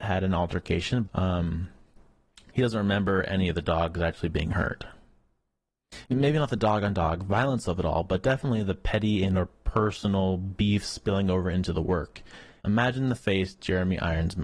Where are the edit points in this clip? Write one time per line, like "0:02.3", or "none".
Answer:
0:01.0
0:06.0
0:12.6